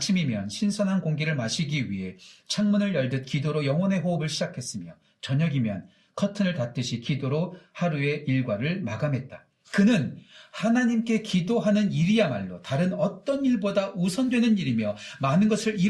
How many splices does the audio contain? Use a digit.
0